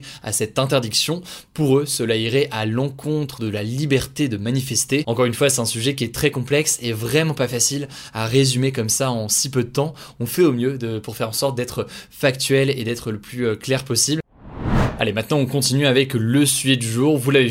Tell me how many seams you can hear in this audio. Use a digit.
0